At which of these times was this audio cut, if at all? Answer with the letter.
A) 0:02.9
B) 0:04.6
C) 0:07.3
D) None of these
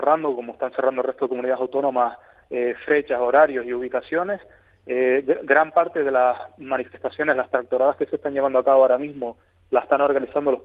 A